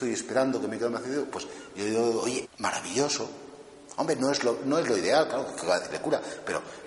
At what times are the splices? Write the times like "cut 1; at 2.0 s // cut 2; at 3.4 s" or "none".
cut 1; at 2.4 s